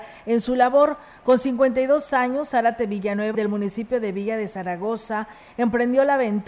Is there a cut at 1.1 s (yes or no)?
no